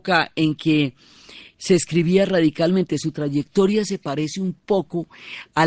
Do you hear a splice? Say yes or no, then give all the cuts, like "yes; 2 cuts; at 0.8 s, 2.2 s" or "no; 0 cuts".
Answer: no; 0 cuts